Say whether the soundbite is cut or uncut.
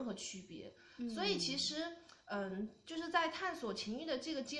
uncut